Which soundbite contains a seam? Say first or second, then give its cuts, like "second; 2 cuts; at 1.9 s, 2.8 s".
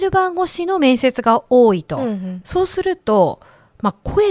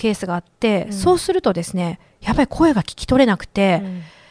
first; 1 cut; at 2.4 s